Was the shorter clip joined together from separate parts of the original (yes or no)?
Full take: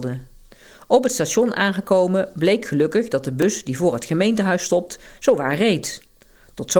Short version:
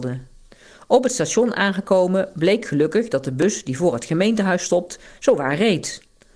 no